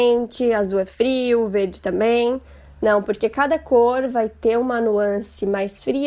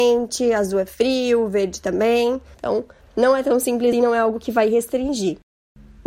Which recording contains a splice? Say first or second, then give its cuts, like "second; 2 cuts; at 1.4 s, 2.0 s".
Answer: second; 2 cuts; at 2.5 s, 3.9 s